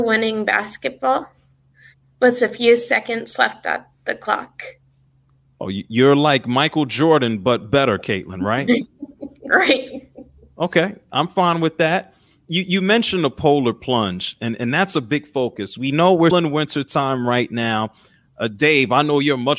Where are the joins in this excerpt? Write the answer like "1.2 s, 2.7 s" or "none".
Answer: 16.3 s